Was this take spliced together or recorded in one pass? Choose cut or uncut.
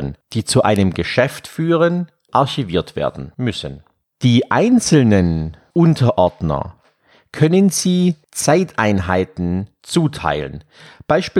uncut